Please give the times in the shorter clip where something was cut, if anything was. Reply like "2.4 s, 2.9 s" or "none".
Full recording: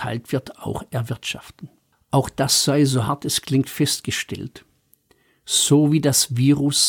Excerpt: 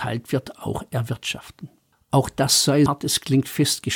2.9 s